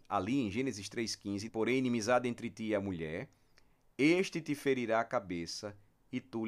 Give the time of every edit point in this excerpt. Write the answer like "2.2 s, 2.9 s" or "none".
1.5 s, 3.9 s